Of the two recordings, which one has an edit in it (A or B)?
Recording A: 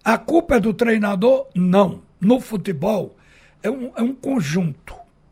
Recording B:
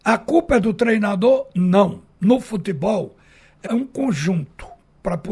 B